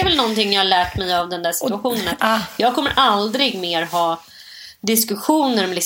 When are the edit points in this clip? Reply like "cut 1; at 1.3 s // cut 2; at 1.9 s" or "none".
none